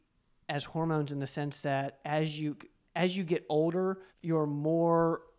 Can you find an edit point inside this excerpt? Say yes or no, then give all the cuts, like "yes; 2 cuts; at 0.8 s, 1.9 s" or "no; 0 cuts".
yes; 1 cut; at 4.1 s